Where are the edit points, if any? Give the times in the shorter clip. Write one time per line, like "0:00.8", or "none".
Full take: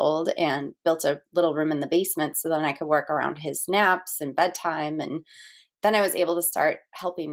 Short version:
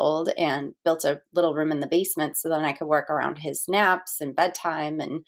none